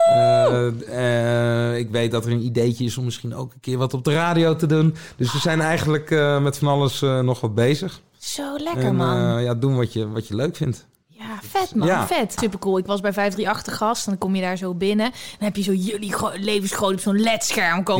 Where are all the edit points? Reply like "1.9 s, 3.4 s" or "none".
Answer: 12.4 s